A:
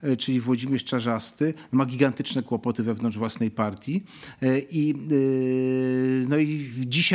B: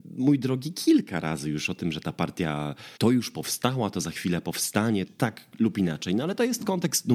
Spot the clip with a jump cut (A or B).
B